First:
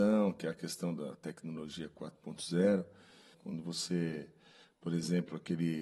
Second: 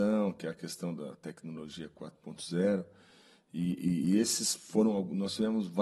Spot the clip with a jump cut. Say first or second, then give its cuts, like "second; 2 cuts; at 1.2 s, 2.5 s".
first; 1 cut; at 3.3 s